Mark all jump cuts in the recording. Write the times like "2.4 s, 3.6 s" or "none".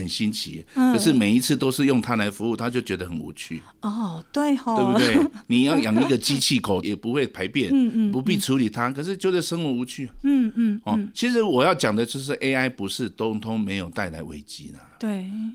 6.8 s